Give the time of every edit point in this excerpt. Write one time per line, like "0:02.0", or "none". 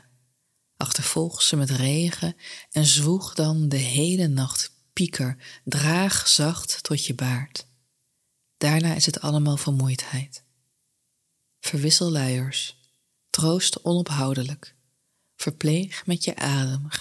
none